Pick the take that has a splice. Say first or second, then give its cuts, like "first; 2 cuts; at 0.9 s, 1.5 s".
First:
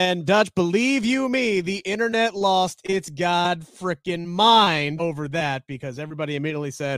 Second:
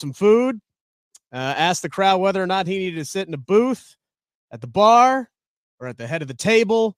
first; 1 cut; at 5.0 s